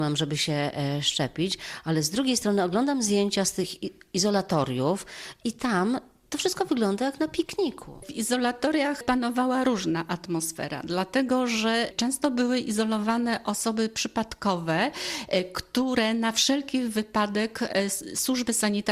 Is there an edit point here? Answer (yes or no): no